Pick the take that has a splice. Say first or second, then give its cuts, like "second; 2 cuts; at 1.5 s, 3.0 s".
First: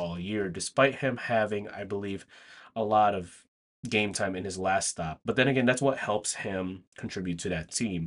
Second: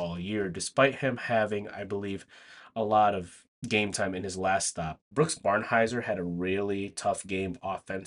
second; 2 cuts; at 3.6 s, 5.0 s